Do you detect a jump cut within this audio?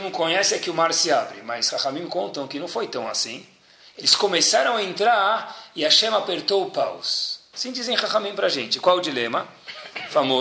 yes; 1 cut; at 7.5 s

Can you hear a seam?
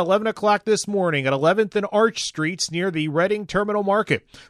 no; 0 cuts

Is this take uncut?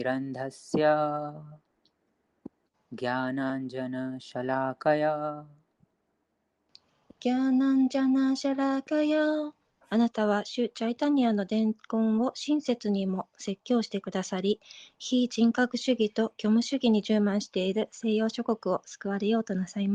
no; 2 cuts; at 2.7 s, 9.8 s

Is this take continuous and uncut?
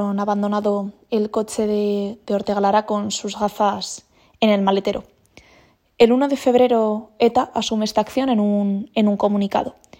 yes; 0 cuts

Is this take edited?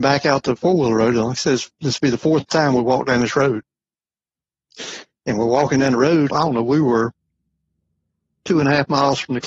yes; 1 cut; at 6.3 s

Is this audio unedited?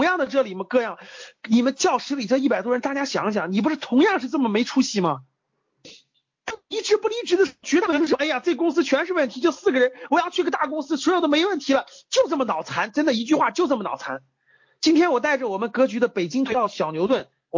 yes; 0 cuts

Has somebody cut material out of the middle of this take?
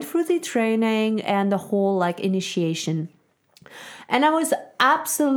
no; 0 cuts

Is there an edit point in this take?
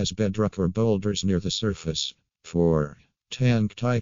no; 0 cuts

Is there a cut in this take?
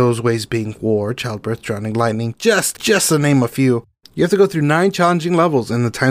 yes; 1 cut; at 2.7 s

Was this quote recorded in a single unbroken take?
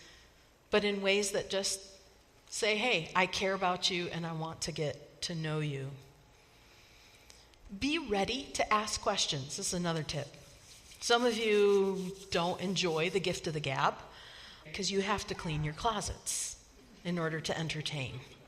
no; 1 cut; at 14.6 s

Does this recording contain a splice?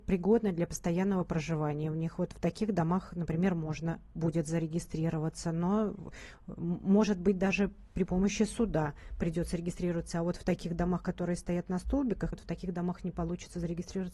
yes; 1 cut; at 12.3 s

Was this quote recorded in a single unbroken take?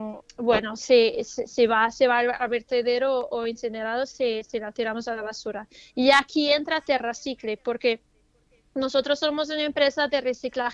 yes; 0 cuts

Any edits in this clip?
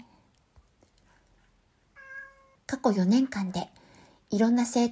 yes; 1 cut; at 2.6 s

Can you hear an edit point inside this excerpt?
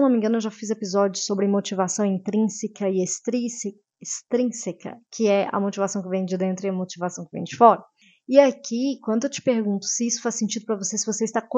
no; 0 cuts

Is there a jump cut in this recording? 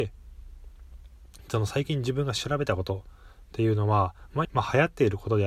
yes; 1 cut; at 4.4 s

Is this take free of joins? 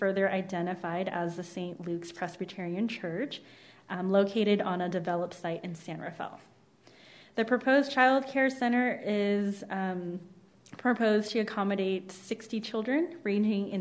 yes; 0 cuts

